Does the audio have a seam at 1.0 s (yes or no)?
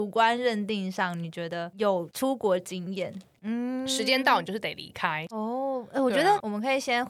no